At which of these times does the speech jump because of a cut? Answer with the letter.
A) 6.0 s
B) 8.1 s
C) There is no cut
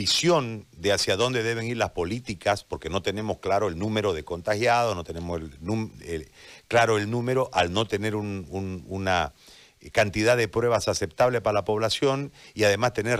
A